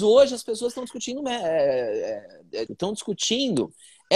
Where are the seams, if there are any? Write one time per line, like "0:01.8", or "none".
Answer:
0:02.7